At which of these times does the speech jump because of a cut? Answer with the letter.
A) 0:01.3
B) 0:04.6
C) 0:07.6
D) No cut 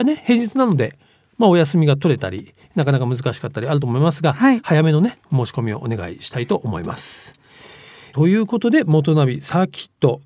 D